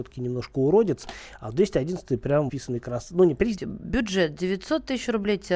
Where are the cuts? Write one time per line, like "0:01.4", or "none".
0:02.5
0:03.6